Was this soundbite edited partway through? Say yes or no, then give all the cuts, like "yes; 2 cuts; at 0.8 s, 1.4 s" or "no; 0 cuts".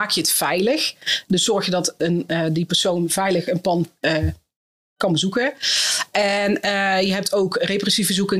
no; 0 cuts